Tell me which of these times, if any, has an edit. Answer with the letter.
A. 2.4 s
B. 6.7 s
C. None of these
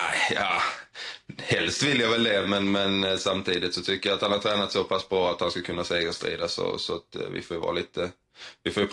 C